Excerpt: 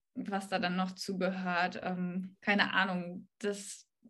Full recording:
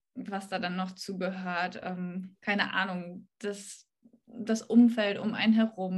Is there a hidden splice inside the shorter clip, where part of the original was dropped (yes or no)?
no